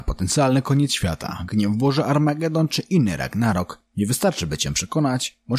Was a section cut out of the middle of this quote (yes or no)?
no